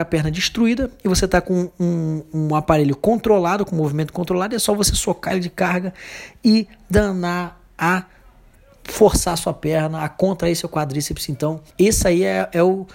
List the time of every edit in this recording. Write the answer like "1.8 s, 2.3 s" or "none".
11.7 s